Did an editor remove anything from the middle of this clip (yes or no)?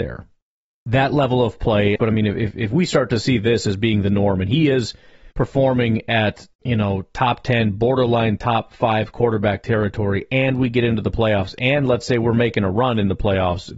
yes